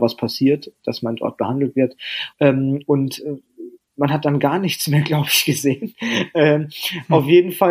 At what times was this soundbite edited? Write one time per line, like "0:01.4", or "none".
0:02.3